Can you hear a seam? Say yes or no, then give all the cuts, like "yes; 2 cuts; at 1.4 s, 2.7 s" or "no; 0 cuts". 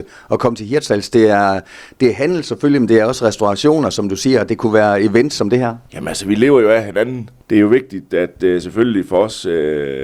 no; 0 cuts